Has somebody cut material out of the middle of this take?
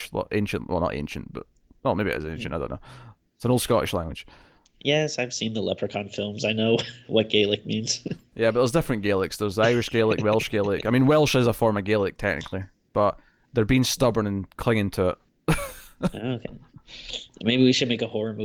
no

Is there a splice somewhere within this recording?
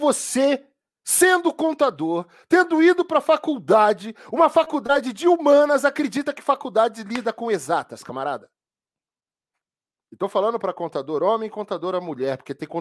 no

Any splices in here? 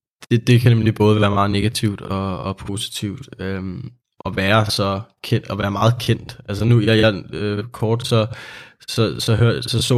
no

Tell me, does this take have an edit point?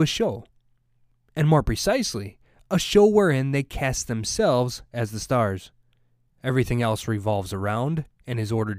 yes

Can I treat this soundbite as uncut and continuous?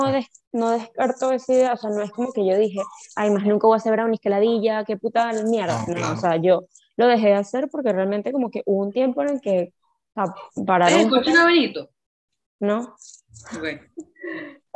yes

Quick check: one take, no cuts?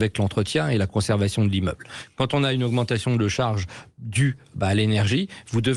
yes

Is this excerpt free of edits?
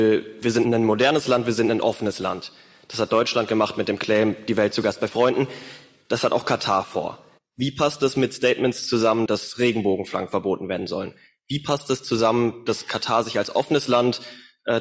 no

